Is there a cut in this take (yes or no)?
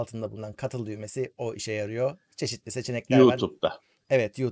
no